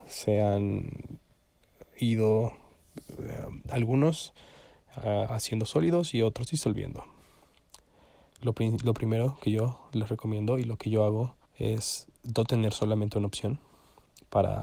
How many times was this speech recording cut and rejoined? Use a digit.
2